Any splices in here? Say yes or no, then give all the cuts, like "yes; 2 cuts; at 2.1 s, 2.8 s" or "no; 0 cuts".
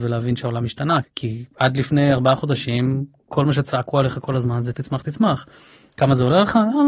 yes; 2 cuts; at 1.0 s, 4.7 s